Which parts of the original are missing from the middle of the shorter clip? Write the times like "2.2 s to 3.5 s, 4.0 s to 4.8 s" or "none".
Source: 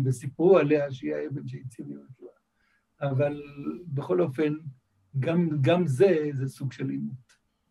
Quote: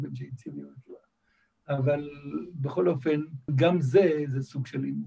4.8 s to 5.5 s